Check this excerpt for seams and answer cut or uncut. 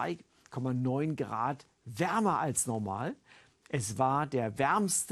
uncut